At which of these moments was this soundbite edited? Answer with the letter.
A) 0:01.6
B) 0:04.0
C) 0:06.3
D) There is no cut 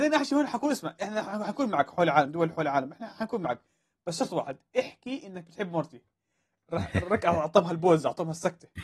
D